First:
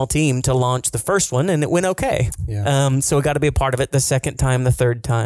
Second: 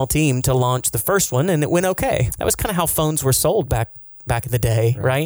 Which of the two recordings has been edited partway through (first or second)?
second